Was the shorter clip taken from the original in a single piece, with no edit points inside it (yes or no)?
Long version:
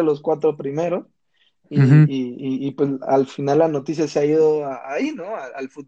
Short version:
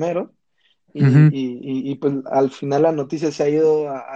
yes